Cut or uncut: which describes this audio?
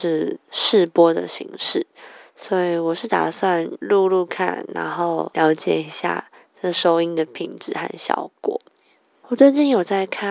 cut